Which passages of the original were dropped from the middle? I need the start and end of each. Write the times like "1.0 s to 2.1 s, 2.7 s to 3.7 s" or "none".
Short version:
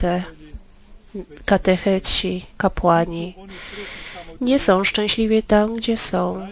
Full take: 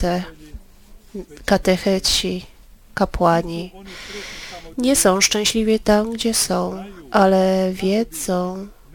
2.5 s to 2.9 s